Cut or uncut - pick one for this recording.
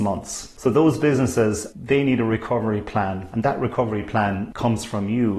cut